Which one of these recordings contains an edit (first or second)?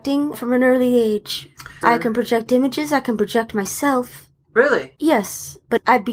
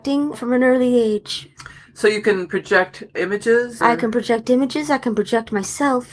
first